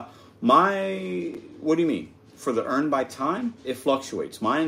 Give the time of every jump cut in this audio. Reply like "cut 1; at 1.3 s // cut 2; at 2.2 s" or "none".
none